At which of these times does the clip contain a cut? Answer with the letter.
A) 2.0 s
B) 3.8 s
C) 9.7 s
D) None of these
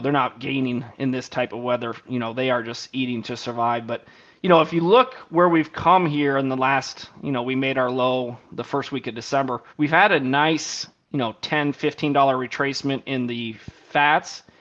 C